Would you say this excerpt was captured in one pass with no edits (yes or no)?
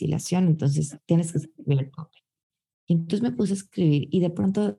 yes